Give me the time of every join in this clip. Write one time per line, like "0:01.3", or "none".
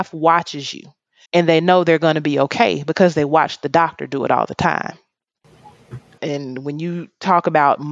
0:01.3
0:06.2